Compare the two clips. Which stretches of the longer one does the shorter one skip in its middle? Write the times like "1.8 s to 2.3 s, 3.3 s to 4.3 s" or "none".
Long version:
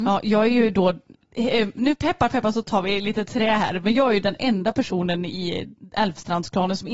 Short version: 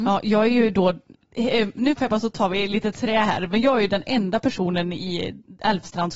2.0 s to 2.3 s